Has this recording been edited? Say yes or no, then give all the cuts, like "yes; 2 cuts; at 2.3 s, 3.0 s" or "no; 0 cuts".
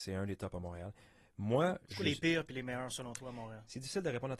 no; 0 cuts